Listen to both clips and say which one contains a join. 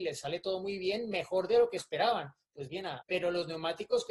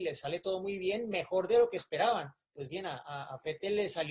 first; 1 cut; at 3.0 s

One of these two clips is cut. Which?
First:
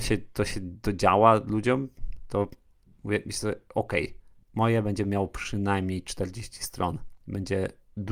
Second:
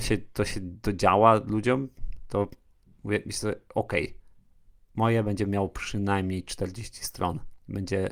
first; 1 cut; at 4.4 s

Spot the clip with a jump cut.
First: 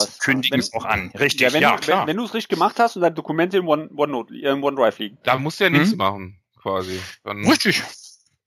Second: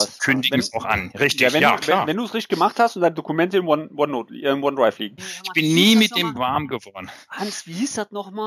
second; 1 cut; at 5.2 s

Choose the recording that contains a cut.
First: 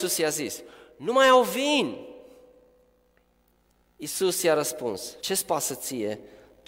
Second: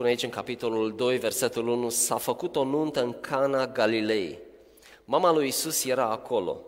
first; 1 cut; at 5.2 s

